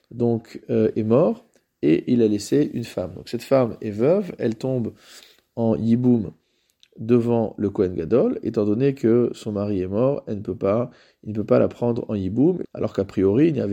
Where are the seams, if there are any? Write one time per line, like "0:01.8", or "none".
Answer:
0:12.6